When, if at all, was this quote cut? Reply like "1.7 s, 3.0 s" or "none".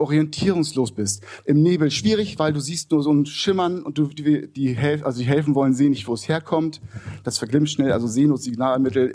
1.4 s